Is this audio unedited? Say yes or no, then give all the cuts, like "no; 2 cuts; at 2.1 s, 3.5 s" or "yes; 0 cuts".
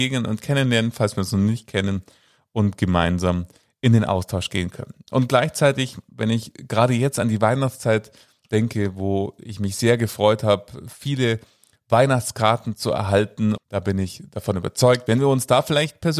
no; 2 cuts; at 13.6 s, 15.1 s